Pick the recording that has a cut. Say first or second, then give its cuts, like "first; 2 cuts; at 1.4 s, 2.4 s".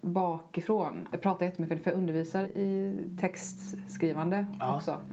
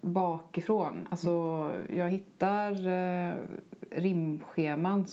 first; 2 cuts; at 1.1 s, 2.4 s